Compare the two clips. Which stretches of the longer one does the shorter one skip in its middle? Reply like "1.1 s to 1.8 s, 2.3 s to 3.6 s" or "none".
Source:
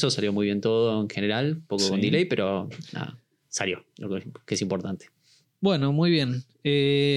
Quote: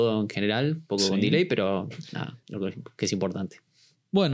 3.2 s to 3.9 s